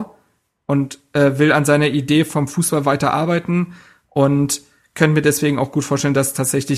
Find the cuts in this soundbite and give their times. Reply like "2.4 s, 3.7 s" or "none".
none